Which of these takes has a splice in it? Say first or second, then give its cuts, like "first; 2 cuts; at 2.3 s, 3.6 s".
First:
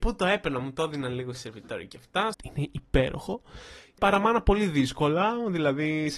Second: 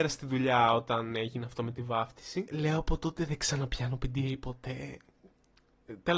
first; 2 cuts; at 2.3 s, 4.0 s